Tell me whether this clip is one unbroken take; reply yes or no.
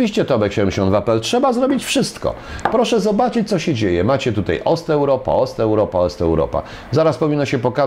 yes